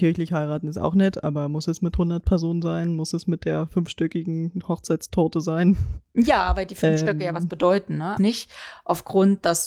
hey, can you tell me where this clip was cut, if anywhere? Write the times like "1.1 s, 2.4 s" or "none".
8.2 s